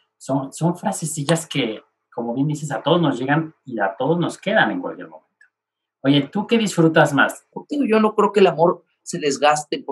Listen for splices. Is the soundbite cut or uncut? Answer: cut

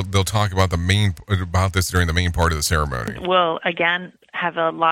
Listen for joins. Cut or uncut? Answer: uncut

